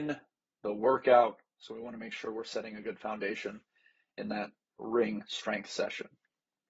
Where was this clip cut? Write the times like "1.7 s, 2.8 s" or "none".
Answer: 4.8 s